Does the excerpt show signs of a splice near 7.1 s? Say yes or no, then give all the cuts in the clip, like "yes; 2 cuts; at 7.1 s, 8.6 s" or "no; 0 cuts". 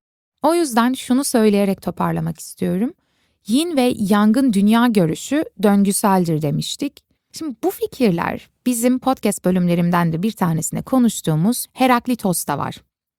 yes; 1 cut; at 7.1 s